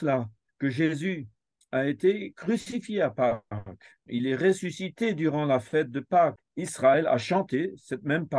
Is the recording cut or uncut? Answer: cut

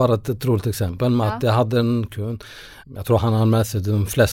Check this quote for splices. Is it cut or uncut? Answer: cut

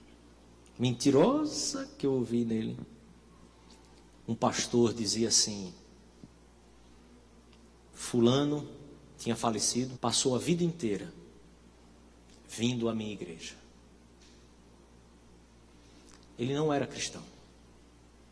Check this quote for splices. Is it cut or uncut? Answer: cut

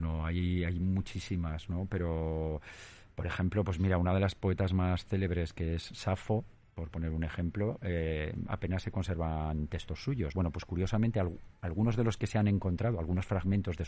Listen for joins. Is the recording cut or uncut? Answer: cut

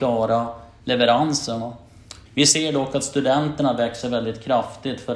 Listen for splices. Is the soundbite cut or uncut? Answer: cut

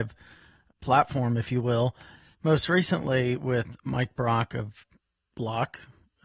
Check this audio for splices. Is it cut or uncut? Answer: cut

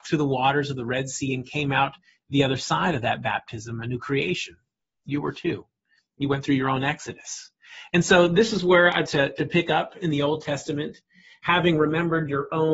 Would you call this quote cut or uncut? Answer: cut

